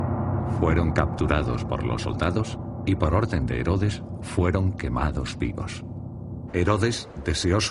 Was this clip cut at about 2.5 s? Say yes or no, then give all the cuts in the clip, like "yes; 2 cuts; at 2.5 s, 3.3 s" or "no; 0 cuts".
no; 1 cut; at 6.5 s